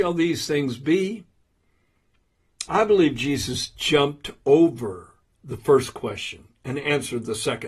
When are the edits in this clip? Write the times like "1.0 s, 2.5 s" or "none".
2.7 s